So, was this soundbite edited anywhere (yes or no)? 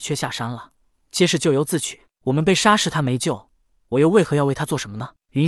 no